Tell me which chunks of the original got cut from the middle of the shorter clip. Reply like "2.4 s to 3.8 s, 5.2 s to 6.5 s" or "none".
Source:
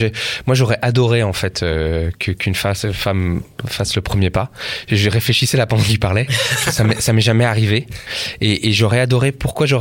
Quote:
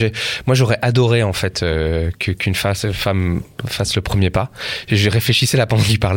none